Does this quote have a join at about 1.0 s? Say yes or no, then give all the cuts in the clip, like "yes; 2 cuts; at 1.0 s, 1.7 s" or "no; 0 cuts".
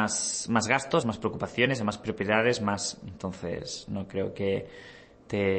yes; 1 cut; at 1.0 s